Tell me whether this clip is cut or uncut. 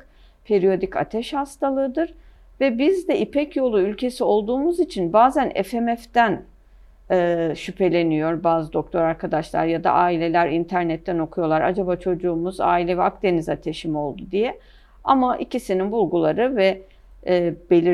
uncut